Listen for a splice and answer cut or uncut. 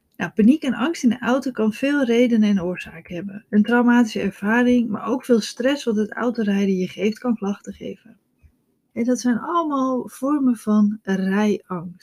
cut